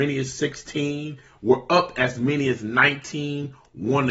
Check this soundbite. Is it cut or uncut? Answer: uncut